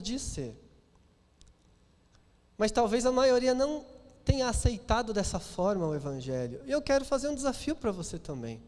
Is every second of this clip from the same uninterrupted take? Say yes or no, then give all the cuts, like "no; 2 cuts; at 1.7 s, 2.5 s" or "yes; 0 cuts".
yes; 0 cuts